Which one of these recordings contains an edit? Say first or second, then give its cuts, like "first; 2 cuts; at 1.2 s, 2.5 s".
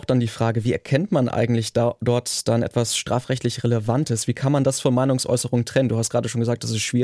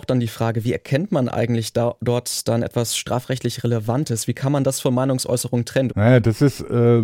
second; 1 cut; at 5.9 s